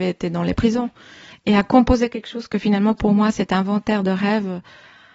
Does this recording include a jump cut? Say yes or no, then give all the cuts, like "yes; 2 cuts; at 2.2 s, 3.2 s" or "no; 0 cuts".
yes; 1 cut; at 1.3 s